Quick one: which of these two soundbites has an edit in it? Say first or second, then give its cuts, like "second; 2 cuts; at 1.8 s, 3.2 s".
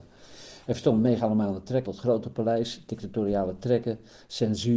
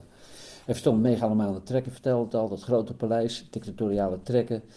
first; 1 cut; at 1.9 s